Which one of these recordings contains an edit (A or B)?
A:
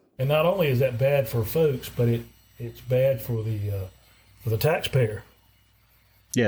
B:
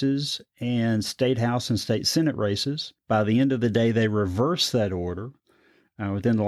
B